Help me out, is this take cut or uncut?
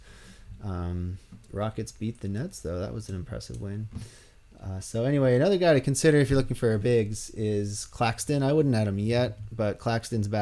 uncut